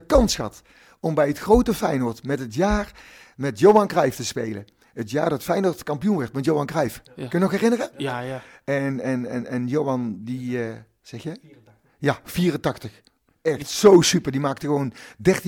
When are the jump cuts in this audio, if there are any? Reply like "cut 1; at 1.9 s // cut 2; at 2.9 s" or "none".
none